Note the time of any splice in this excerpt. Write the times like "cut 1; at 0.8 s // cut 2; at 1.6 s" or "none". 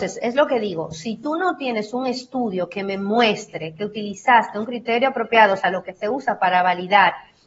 none